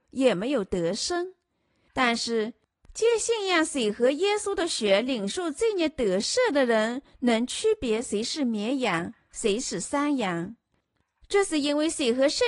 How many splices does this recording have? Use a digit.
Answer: 0